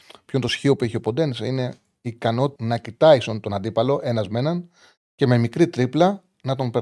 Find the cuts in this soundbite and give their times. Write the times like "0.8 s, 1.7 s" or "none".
2.6 s